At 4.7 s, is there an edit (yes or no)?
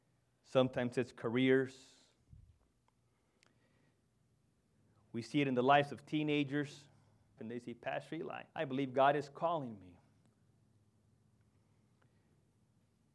no